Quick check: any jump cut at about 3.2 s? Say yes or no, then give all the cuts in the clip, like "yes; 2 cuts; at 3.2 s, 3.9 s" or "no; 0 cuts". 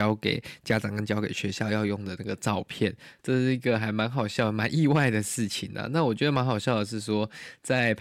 yes; 1 cut; at 3.2 s